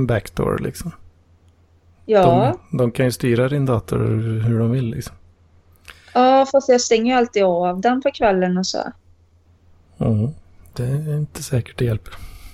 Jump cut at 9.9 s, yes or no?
no